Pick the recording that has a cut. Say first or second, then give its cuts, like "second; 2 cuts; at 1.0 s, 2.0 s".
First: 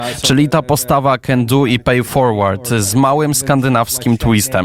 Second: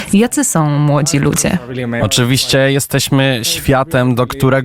second; 1 cut; at 2.0 s